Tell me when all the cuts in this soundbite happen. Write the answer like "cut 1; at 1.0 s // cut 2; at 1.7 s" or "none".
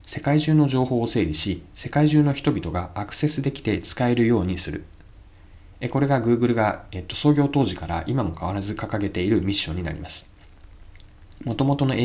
none